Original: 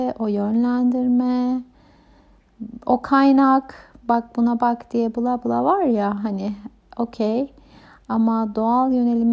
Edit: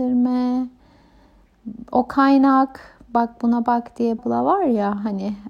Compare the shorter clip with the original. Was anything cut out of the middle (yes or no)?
yes